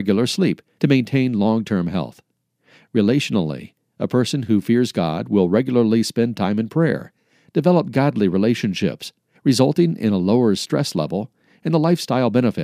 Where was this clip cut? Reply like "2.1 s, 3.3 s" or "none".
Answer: 9.4 s